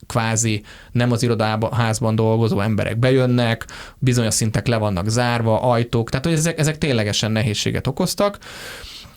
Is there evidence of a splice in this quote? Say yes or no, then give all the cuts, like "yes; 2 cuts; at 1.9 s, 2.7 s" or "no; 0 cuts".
no; 0 cuts